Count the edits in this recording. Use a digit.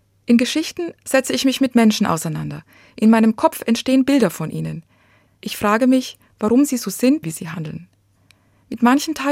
2